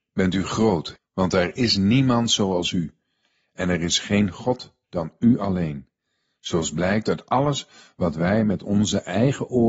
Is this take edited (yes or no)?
yes